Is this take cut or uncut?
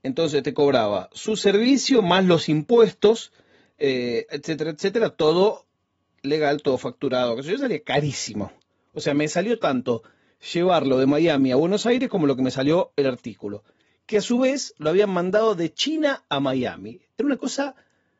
cut